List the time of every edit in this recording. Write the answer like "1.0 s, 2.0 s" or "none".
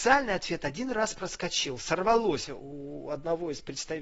2.5 s